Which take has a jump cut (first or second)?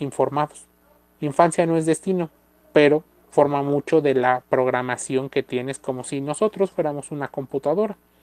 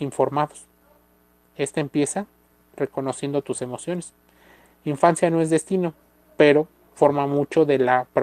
first